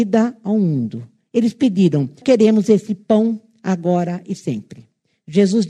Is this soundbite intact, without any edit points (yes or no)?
no